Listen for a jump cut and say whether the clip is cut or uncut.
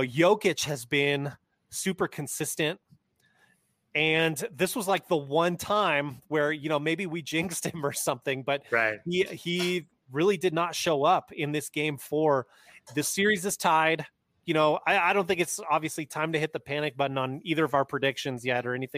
uncut